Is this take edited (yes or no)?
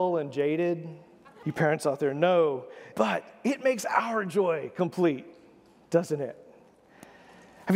yes